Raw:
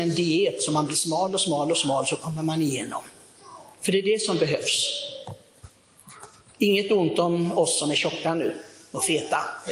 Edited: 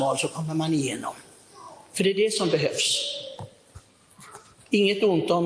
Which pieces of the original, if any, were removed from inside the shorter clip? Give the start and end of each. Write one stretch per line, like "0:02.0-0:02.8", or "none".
none